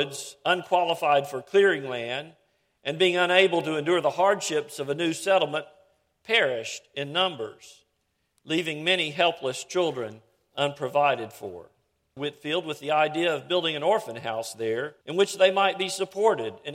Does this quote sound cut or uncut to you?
cut